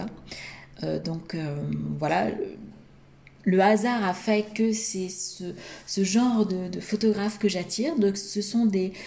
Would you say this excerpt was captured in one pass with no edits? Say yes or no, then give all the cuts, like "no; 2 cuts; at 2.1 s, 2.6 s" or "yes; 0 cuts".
yes; 0 cuts